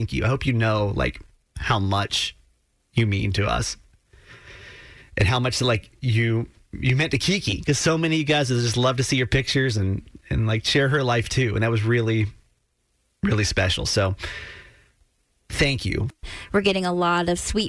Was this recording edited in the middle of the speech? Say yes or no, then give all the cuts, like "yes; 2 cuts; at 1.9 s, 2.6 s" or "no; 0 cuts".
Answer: no; 0 cuts